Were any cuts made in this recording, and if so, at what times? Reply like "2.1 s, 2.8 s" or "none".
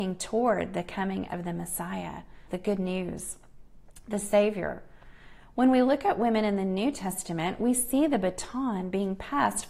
2.5 s